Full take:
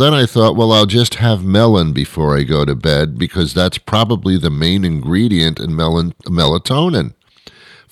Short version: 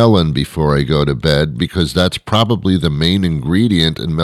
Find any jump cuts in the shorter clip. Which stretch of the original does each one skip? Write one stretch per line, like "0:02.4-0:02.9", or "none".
none